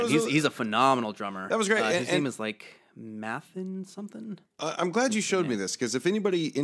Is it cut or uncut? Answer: uncut